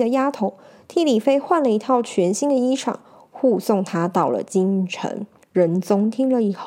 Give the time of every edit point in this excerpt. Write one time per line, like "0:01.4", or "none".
0:05.4